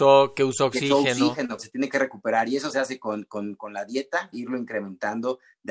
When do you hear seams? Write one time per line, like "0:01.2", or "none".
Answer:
0:01.6
0:04.3